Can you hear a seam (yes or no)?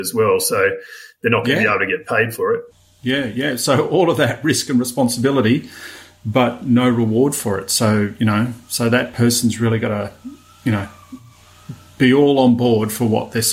no